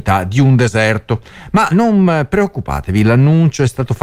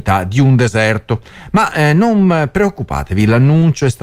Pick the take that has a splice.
first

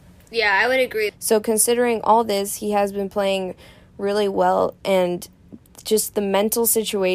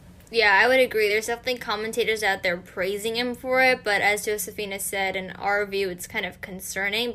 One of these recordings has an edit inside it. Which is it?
first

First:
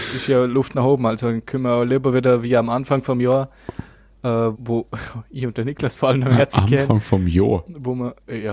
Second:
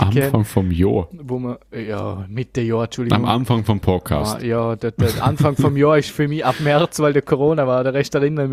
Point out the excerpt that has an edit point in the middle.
first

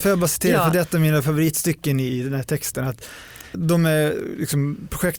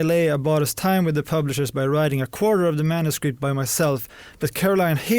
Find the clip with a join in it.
first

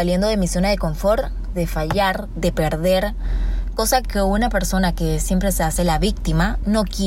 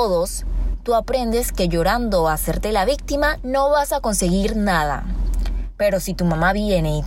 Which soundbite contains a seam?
first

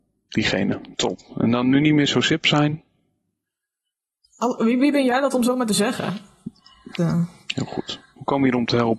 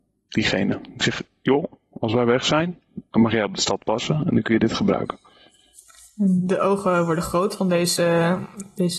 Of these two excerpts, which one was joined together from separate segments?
first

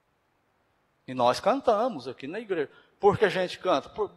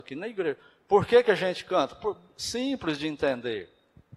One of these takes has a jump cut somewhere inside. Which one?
first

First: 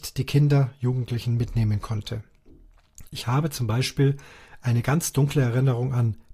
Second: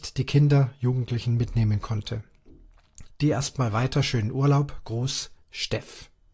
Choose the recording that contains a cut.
second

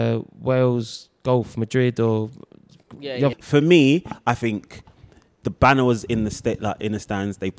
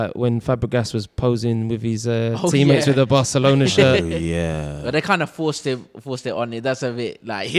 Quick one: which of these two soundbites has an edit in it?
first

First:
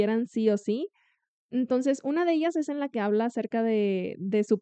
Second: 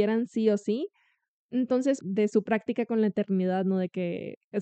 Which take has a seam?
second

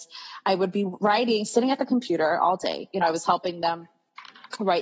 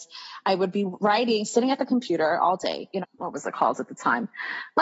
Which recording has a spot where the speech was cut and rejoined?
second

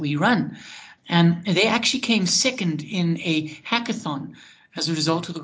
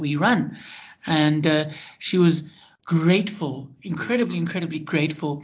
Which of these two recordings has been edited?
first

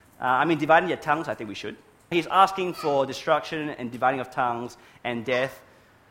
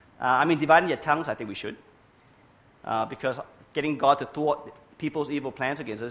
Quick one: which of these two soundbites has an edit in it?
first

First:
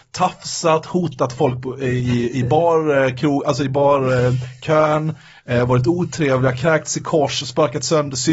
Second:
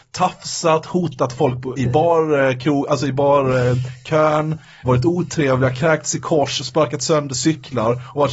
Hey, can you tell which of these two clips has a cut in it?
second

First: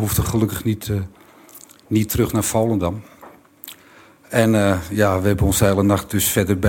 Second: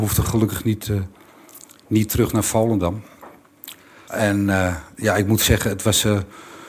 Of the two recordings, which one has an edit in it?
second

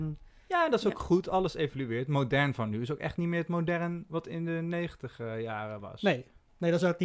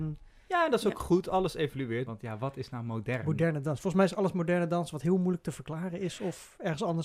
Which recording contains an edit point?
second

